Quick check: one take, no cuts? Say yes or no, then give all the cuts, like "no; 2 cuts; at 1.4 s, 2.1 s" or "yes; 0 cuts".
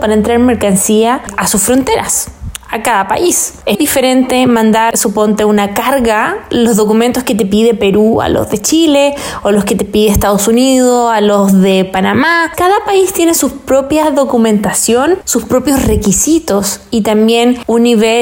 no; 1 cut; at 3.7 s